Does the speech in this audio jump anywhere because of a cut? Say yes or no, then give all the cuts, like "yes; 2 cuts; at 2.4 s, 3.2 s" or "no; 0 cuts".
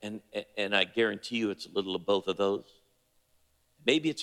no; 0 cuts